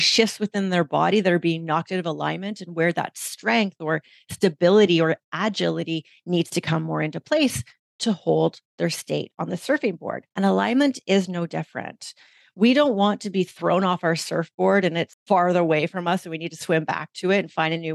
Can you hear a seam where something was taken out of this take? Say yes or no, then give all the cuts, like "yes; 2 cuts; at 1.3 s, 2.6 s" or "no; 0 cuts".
yes; 2 cuts; at 10.3 s, 15.1 s